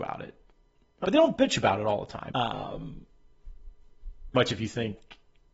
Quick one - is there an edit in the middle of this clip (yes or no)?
yes